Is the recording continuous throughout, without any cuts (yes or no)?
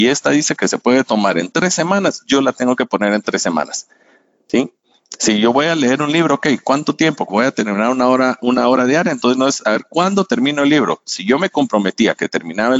no